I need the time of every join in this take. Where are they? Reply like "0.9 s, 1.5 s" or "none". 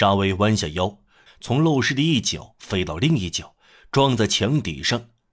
1.3 s